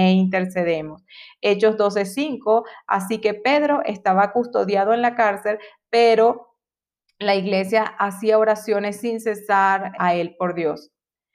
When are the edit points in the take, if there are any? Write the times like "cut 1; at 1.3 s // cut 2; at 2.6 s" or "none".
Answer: cut 1; at 10.0 s